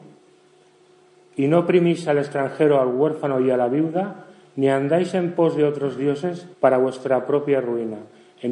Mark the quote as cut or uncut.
cut